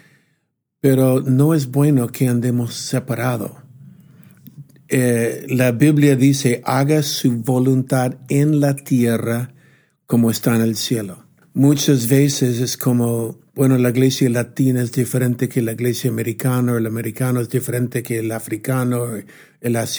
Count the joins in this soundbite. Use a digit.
2